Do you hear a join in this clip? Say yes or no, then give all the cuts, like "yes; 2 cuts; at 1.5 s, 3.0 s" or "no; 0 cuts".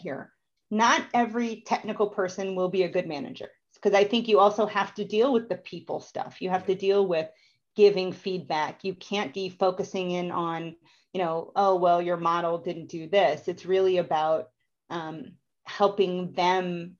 yes; 1 cut; at 9.3 s